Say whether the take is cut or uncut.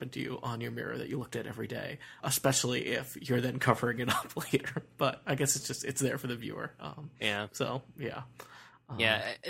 cut